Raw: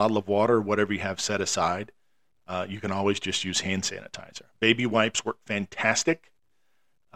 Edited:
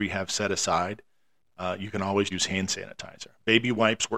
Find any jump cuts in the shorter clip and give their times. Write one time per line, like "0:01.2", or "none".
0:02.3